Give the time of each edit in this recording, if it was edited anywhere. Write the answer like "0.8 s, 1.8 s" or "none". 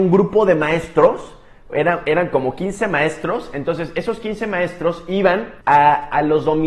5.6 s